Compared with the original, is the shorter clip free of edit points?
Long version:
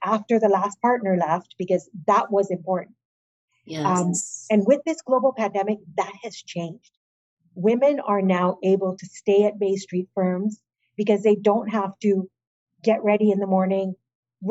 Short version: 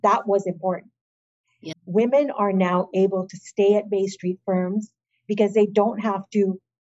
no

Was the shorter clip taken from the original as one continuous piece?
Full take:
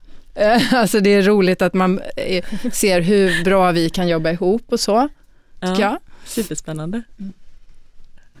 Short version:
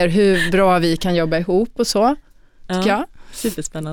yes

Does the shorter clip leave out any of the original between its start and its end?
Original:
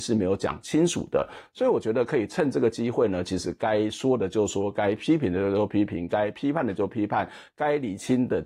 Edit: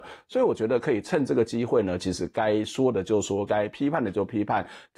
yes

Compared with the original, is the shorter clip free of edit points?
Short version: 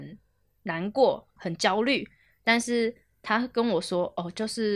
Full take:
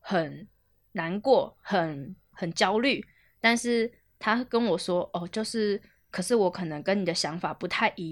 no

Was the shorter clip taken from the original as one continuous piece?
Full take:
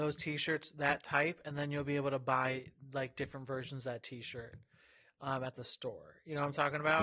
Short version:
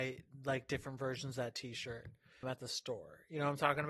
no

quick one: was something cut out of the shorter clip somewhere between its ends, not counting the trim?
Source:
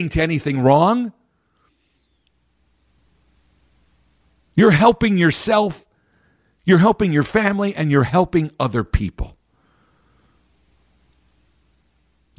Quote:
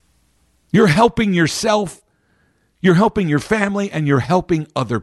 no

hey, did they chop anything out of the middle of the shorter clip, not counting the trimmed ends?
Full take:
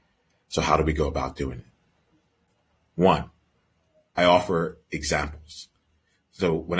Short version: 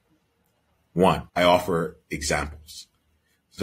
yes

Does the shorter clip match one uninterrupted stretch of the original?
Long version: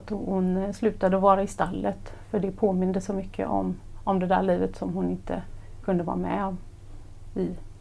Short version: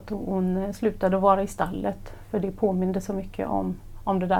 yes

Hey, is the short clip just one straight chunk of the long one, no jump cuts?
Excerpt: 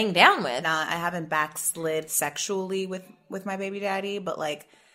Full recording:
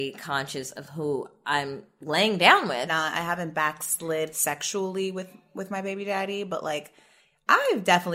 yes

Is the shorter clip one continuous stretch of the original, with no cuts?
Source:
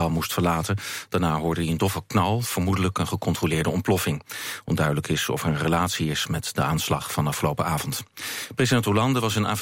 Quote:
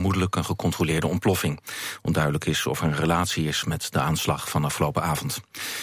yes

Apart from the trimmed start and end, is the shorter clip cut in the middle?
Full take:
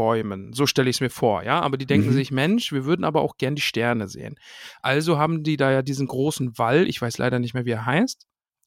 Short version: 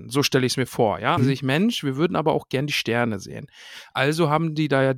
yes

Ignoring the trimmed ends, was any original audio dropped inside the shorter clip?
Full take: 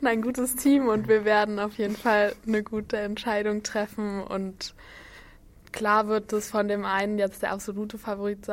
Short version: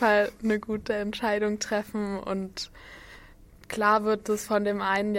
no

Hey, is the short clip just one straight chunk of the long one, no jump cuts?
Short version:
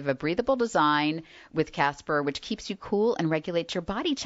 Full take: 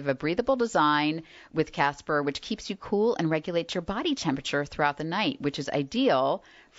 yes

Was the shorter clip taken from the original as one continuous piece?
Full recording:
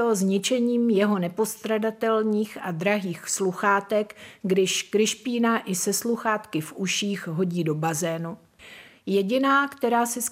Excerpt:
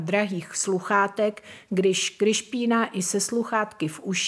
yes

